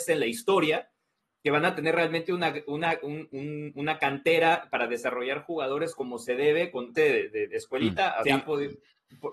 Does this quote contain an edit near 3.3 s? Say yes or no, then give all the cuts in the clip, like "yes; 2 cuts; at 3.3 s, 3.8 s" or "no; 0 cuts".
no; 2 cuts; at 6.9 s, 8.2 s